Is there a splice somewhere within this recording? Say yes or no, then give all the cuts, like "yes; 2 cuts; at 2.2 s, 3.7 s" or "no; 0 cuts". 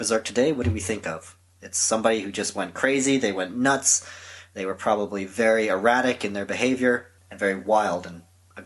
no; 0 cuts